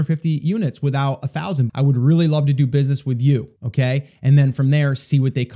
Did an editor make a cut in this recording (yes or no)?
yes